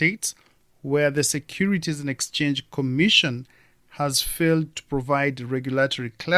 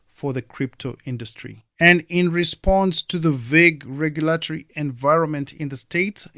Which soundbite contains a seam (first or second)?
second